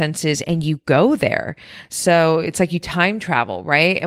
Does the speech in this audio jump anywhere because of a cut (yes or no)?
no